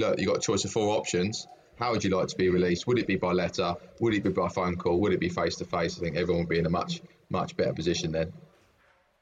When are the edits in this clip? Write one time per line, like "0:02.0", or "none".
none